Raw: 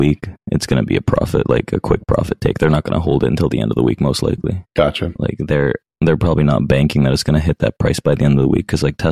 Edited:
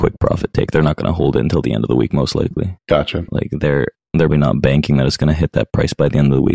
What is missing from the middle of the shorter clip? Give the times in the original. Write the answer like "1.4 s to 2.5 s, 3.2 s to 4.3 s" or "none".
6.2 s to 6.4 s